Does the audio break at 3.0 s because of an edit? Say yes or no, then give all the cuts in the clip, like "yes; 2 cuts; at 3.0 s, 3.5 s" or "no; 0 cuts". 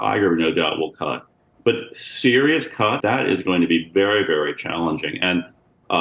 yes; 1 cut; at 3.0 s